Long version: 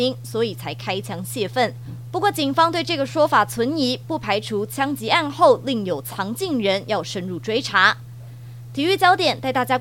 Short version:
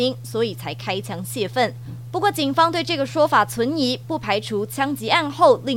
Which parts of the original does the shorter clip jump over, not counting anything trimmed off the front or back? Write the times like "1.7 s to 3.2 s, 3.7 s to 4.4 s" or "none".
none